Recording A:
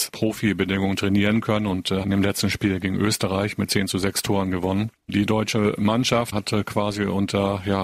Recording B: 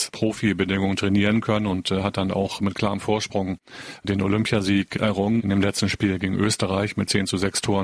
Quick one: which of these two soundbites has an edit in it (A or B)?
A